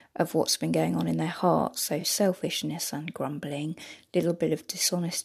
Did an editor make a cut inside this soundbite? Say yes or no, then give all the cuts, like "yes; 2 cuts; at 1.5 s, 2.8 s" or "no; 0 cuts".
no; 0 cuts